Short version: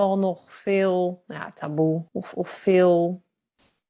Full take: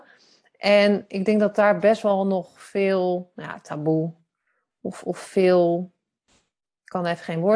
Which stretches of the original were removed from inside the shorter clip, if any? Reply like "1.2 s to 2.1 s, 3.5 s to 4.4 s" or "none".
4.2 s to 4.8 s